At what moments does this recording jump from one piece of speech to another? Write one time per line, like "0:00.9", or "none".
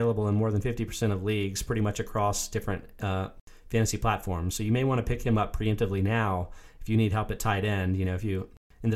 none